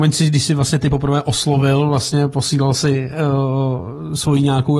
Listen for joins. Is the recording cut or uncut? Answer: uncut